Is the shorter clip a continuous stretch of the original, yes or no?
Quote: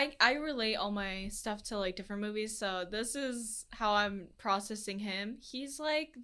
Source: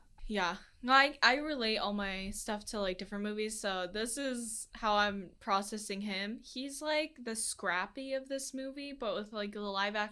yes